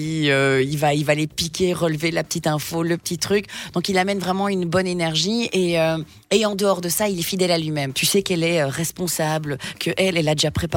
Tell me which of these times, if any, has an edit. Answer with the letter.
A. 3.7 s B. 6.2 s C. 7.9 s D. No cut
C